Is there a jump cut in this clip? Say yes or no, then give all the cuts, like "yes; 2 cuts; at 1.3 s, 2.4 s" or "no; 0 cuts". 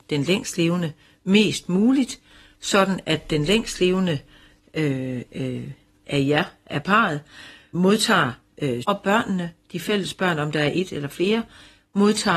yes; 3 cuts; at 5.3 s, 7.7 s, 8.8 s